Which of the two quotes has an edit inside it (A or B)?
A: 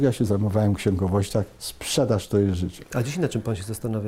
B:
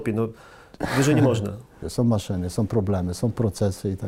B